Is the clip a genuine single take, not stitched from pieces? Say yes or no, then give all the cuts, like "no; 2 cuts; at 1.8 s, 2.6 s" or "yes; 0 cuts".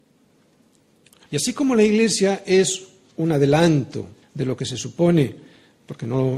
no; 2 cuts; at 1.3 s, 4.2 s